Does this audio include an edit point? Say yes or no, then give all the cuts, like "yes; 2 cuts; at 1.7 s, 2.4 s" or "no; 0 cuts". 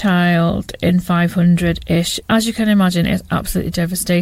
yes; 1 cut; at 2.2 s